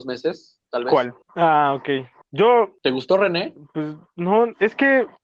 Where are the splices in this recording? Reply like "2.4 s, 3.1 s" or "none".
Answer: 1.2 s